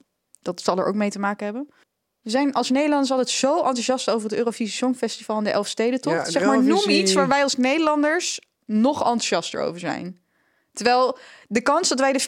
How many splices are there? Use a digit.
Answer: 0